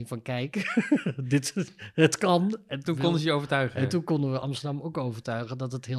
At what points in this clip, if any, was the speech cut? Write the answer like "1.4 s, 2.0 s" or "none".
2.8 s